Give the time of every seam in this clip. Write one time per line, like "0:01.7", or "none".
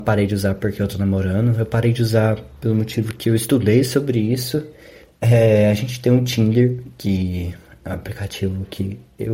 0:05.0